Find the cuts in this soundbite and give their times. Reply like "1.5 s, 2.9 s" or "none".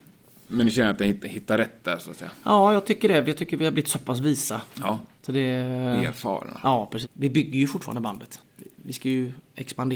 7.0 s